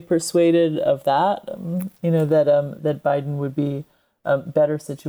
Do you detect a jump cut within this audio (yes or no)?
yes